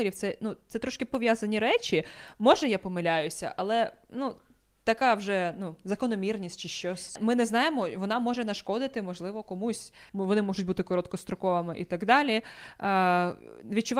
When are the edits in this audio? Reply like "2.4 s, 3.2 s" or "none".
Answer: 10.1 s